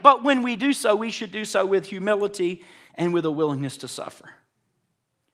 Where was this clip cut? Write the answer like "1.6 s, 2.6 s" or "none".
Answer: none